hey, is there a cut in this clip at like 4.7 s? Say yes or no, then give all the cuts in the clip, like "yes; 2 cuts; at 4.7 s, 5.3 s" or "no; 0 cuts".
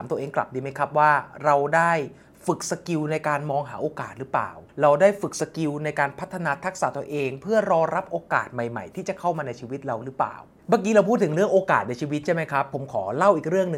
yes; 1 cut; at 4.7 s